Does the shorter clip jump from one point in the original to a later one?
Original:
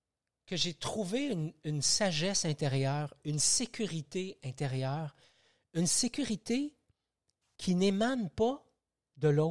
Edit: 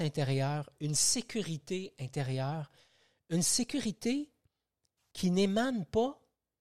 no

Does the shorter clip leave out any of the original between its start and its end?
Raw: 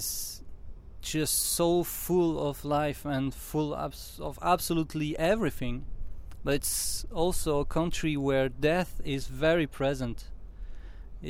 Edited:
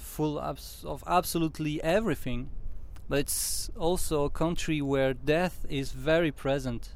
no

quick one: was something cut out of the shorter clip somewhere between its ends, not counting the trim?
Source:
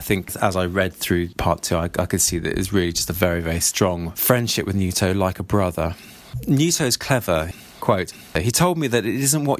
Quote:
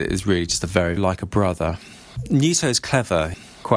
yes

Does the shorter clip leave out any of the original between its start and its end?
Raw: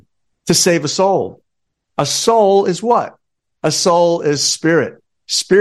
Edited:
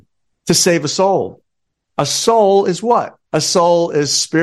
yes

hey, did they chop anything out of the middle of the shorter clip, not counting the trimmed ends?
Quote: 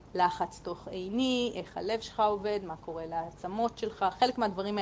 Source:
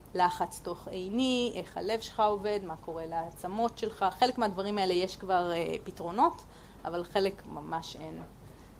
no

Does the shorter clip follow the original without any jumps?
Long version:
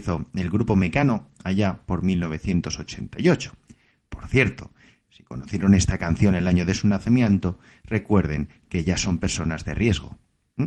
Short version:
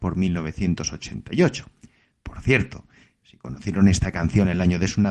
yes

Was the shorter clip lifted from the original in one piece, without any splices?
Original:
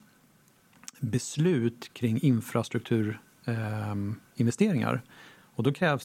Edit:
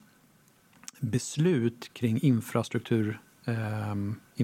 yes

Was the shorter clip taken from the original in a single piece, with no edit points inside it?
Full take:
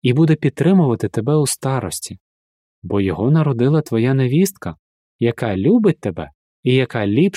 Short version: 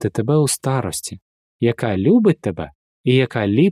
no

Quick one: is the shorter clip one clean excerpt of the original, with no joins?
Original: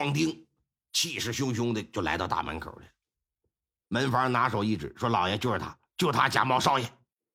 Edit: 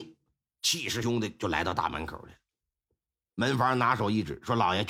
no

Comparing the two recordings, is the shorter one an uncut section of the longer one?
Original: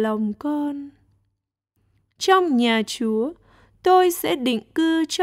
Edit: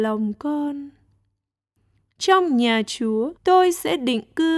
no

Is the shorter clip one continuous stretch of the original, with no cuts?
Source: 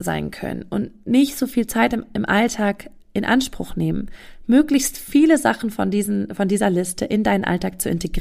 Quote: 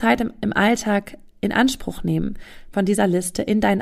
no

